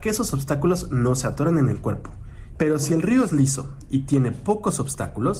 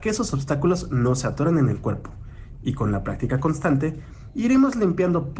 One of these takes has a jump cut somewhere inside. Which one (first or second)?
first